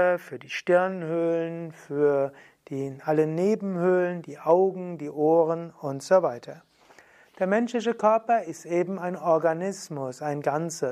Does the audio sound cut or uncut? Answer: uncut